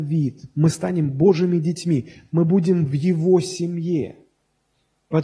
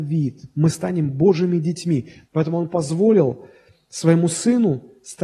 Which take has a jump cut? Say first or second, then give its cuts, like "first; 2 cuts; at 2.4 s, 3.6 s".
second; 1 cut; at 2.2 s